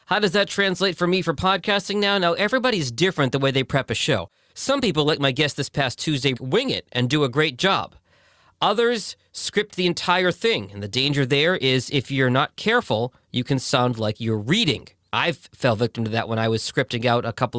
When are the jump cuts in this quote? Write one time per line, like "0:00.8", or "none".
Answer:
0:06.3